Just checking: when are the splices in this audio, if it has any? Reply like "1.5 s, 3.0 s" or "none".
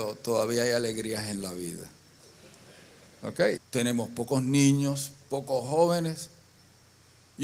3.6 s, 5.2 s